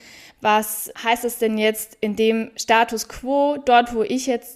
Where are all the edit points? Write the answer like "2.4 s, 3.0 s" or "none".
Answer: 0.9 s